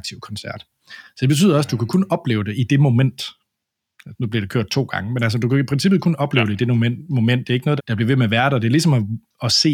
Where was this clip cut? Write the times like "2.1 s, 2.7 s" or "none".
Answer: 7.8 s